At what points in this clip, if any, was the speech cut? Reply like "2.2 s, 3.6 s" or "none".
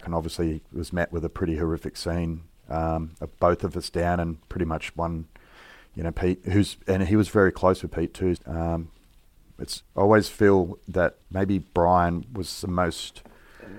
8.4 s, 9.8 s, 11.2 s